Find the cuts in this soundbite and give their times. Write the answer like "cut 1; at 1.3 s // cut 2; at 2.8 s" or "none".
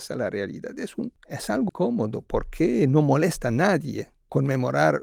cut 1; at 1.7 s